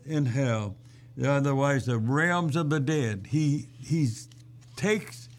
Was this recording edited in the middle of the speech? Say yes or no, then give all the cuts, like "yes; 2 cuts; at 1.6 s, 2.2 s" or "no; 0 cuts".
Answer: no; 0 cuts